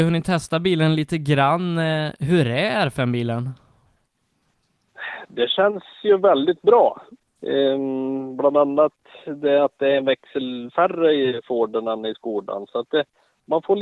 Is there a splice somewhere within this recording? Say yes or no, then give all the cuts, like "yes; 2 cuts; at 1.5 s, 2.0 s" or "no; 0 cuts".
yes; 1 cut; at 7.2 s